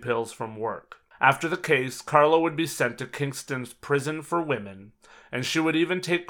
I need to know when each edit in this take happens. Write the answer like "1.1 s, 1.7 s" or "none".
1.1 s